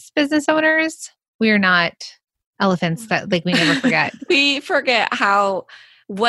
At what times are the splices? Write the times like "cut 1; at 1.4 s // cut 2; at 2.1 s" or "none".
cut 1; at 4.3 s